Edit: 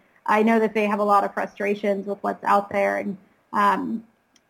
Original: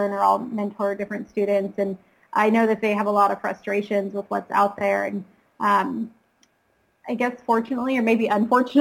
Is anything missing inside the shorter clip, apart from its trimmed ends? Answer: no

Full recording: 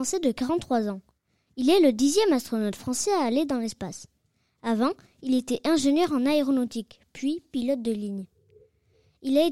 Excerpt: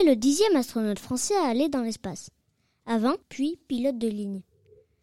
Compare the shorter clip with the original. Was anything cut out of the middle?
yes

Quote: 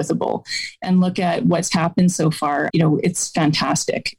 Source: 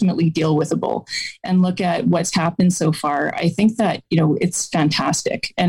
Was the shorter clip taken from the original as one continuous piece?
no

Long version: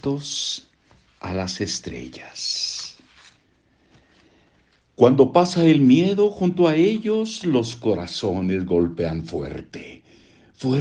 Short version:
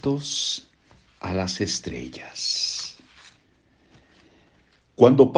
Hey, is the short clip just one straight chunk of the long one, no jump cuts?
yes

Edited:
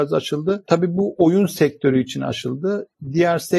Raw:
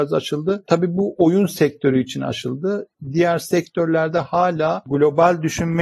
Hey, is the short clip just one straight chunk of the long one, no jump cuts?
yes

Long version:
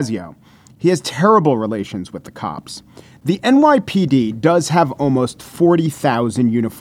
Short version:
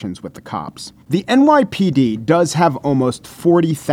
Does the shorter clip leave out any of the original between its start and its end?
yes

